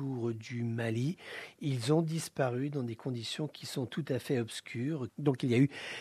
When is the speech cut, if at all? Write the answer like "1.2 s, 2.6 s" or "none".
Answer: 5.1 s